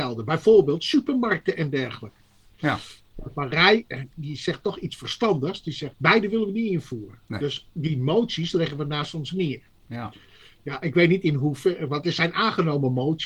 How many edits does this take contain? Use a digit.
0